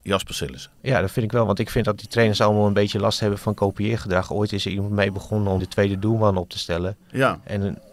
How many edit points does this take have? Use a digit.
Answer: 1